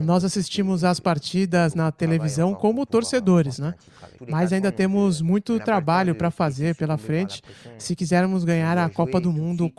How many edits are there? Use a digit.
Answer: 1